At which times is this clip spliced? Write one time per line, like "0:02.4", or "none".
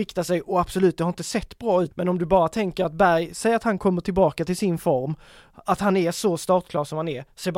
0:01.9